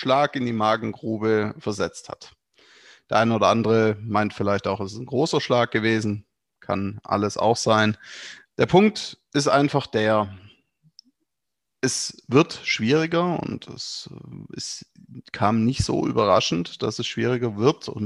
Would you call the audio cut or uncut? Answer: cut